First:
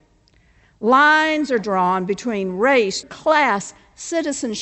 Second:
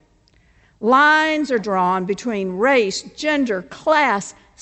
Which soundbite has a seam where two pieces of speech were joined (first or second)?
first